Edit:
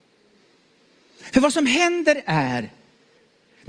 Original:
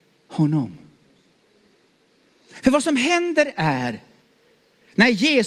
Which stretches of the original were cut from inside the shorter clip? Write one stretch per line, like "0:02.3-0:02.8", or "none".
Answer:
none